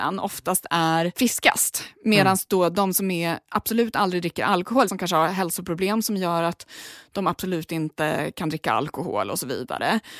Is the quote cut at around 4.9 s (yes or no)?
yes